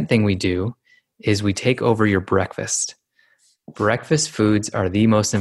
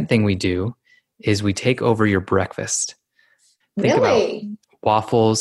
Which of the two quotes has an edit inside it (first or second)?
second